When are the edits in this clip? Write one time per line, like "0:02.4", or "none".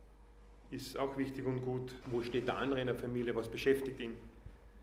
0:02.0